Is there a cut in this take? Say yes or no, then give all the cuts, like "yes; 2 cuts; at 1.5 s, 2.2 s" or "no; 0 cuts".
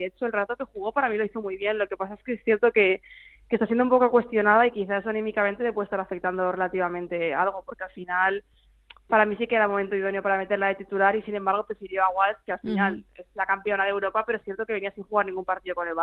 no; 0 cuts